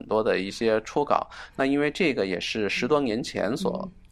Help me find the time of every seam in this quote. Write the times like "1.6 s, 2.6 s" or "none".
none